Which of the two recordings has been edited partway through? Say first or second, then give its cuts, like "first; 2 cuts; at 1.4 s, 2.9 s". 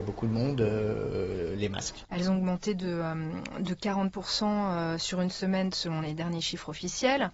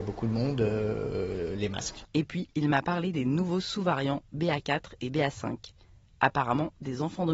first; 1 cut; at 2.1 s